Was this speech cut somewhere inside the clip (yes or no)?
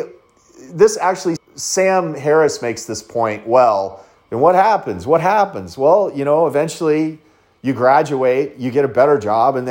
yes